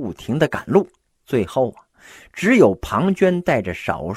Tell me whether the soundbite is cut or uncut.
cut